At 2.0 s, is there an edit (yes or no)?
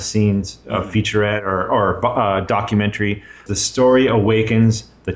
no